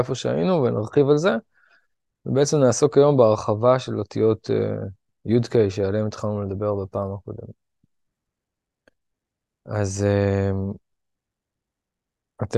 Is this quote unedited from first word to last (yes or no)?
yes